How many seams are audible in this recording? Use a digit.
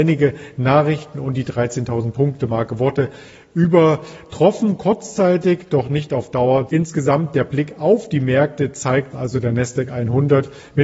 2